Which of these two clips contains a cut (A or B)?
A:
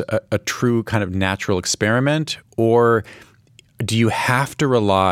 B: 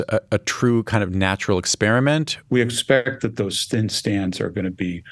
B